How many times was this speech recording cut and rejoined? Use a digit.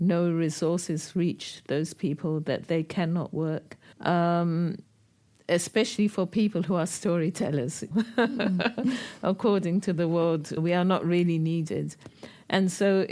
3